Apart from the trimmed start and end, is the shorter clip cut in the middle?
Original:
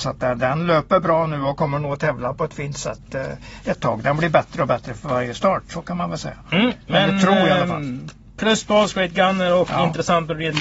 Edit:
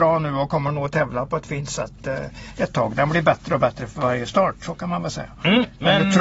no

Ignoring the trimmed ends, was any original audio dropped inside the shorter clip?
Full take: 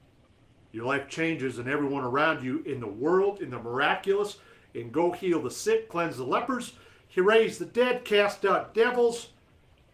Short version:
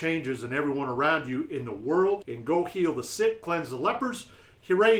yes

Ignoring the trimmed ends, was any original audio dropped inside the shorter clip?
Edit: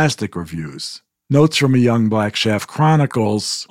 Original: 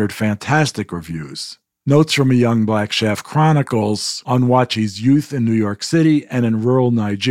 no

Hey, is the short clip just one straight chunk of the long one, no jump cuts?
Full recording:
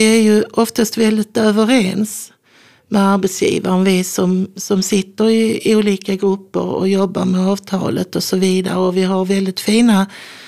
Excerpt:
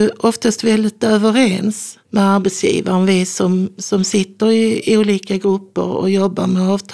no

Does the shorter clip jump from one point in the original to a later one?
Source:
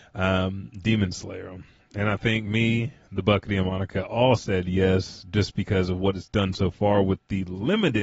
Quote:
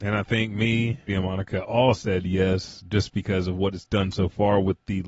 yes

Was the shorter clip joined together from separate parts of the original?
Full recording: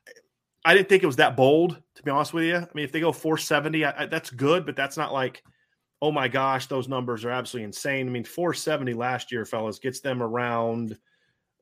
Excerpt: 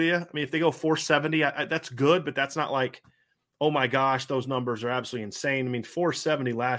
no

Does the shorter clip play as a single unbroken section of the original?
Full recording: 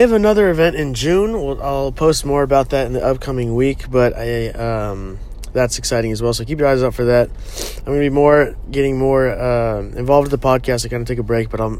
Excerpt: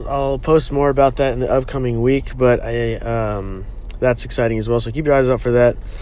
yes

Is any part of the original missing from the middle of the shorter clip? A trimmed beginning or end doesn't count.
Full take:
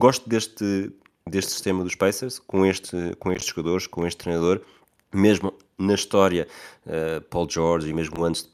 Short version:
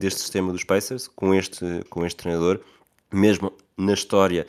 yes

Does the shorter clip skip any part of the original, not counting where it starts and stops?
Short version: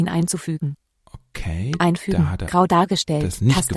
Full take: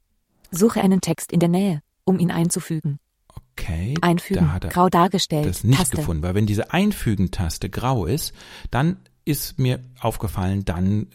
no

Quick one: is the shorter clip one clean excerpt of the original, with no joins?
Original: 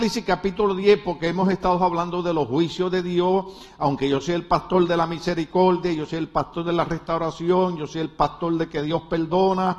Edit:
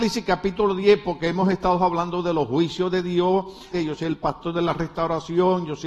no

